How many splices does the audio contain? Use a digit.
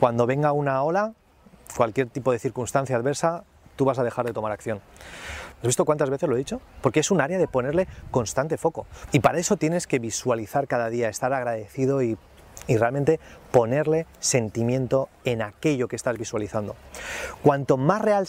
2